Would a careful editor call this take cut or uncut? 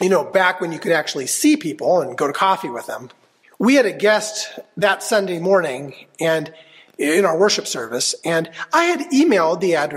cut